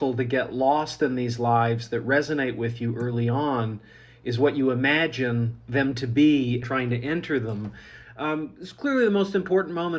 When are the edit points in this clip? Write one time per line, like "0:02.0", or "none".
0:06.6
0:08.0